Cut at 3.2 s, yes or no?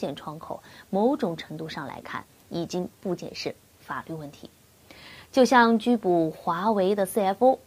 yes